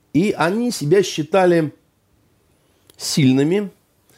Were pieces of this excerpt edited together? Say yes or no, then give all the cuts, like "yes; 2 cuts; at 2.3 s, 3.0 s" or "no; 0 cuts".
no; 0 cuts